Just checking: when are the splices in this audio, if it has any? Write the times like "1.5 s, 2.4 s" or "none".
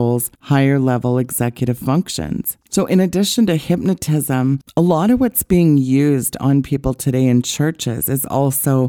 none